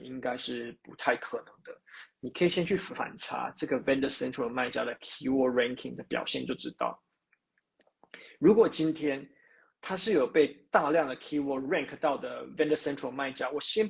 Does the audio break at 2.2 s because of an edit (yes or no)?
yes